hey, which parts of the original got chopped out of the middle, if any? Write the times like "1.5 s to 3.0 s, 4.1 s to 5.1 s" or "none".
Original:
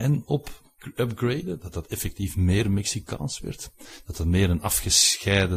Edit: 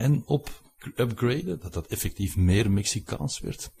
none